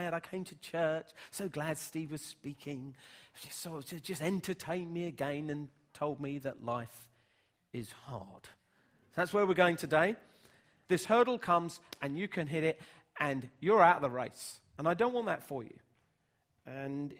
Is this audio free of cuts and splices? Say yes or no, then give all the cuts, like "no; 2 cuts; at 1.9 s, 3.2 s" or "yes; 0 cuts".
no; 1 cut; at 10.9 s